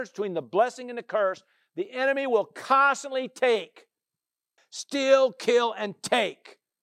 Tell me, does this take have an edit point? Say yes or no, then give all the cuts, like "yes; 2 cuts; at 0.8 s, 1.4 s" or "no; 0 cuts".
yes; 1 cut; at 4.6 s